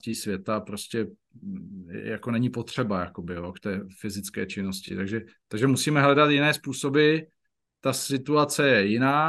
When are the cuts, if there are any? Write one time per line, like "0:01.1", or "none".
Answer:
none